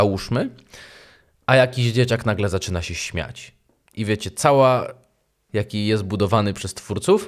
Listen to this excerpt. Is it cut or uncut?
cut